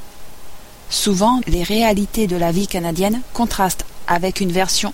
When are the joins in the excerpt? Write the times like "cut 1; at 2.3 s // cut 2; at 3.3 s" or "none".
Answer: cut 1; at 1.4 s